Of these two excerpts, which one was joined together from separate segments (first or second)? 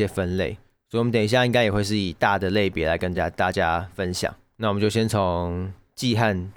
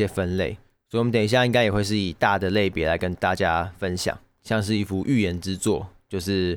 second